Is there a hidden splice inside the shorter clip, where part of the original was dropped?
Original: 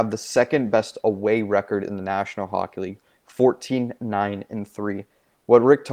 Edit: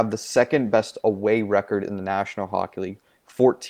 no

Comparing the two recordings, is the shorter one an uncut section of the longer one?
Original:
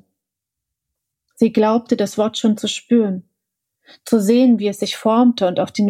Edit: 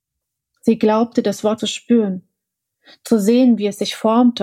no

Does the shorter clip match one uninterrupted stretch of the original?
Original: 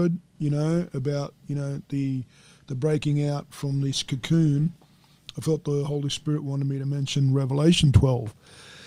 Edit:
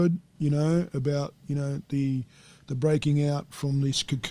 yes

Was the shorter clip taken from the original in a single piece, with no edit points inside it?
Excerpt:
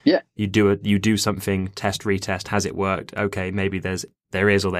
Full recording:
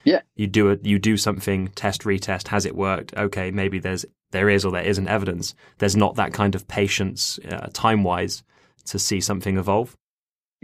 yes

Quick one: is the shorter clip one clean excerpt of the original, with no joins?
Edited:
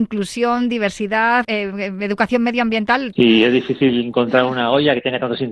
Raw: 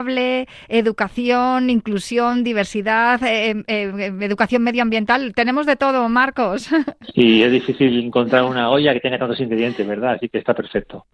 no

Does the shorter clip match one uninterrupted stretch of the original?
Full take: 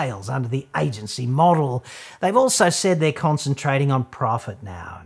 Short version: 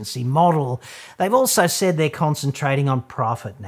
yes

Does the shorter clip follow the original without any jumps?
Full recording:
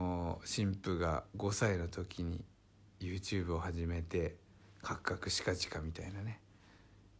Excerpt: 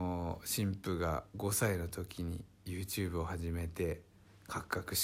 no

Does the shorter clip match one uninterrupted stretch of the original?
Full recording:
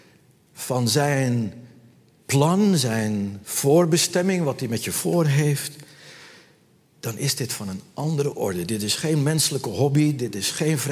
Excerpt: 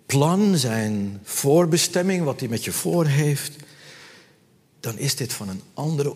yes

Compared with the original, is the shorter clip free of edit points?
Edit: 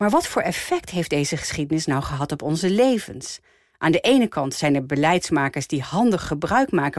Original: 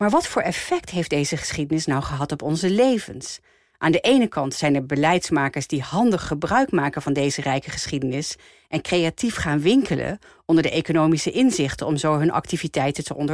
yes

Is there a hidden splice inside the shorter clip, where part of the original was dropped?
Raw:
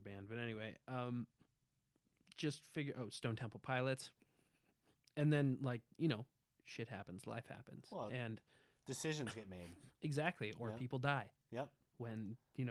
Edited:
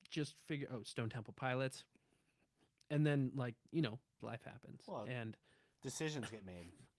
yes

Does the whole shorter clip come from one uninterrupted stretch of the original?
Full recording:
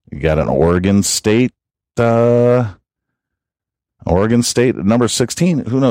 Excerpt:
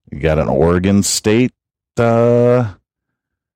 yes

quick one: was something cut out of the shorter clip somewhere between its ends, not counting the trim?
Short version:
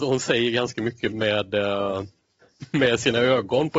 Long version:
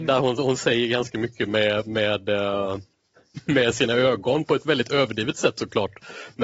yes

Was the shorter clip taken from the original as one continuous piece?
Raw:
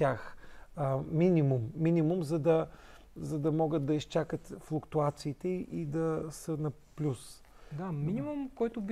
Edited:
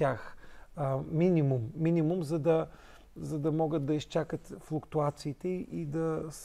yes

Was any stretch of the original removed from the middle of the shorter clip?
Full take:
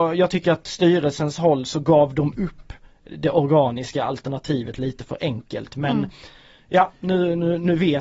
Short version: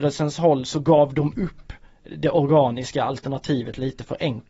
no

